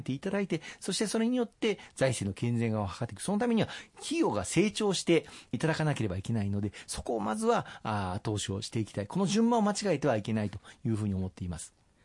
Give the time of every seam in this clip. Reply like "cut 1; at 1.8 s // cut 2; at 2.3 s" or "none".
none

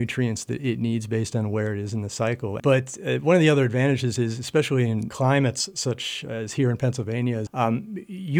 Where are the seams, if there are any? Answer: cut 1; at 2.6 s // cut 2; at 7.5 s

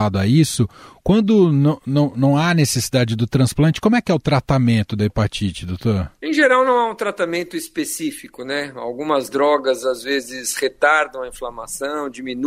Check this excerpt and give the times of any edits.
cut 1; at 6.1 s

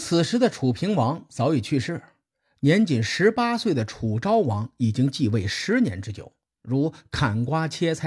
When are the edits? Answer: cut 1; at 6.6 s

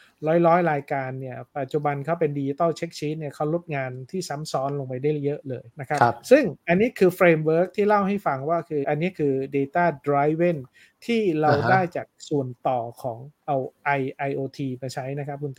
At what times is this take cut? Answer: cut 1; at 5.7 s // cut 2; at 8.8 s

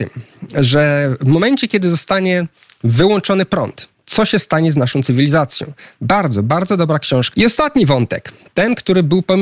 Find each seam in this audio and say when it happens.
cut 1; at 7.3 s

